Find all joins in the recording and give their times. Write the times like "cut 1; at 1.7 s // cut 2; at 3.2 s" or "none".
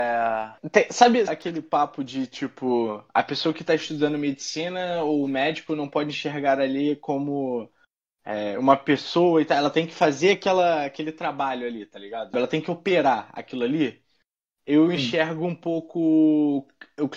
cut 1; at 1.3 s // cut 2; at 12.3 s